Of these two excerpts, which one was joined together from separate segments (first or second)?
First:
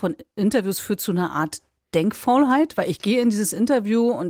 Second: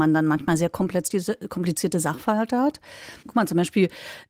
second